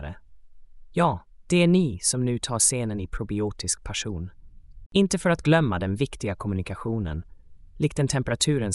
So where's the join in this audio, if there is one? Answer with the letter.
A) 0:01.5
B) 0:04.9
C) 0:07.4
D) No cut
B